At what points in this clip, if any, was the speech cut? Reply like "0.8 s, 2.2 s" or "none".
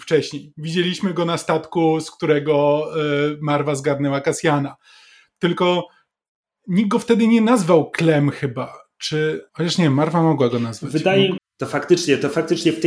9.5 s, 11.4 s